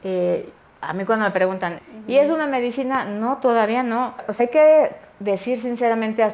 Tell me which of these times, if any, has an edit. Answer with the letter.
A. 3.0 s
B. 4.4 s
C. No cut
C